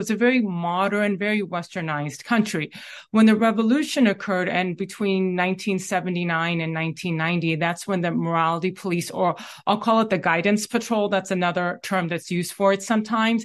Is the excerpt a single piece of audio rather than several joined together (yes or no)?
yes